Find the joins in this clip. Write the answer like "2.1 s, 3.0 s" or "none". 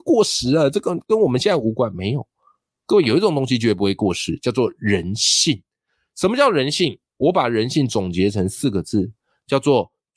none